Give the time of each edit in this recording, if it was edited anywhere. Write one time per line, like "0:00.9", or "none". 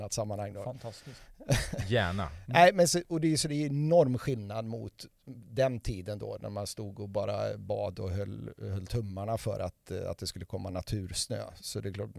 none